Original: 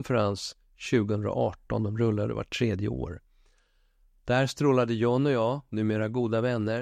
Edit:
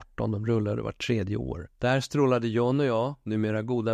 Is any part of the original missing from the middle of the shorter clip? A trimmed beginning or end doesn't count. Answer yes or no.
yes